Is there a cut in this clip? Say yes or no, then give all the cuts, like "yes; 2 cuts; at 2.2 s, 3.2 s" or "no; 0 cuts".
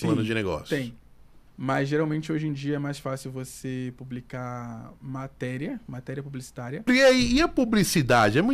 yes; 2 cuts; at 1.5 s, 6.9 s